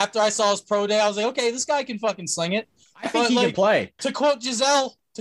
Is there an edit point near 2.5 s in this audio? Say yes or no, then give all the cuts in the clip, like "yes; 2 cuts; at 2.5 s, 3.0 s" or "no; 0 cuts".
no; 1 cut; at 4.0 s